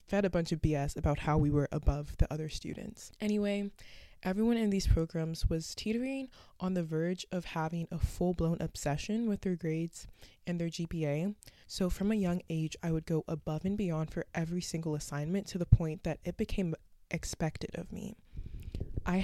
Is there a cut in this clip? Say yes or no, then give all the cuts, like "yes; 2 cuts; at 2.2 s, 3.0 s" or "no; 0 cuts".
yes; 1 cut; at 11.6 s